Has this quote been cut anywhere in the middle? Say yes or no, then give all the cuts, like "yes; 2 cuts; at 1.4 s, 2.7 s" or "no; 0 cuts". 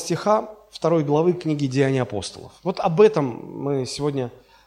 yes; 1 cut; at 2.6 s